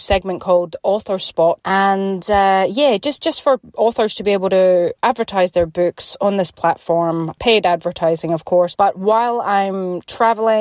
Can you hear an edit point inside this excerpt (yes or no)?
no